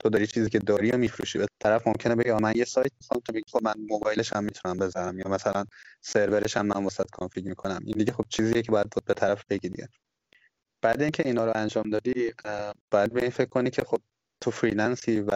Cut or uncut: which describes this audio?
cut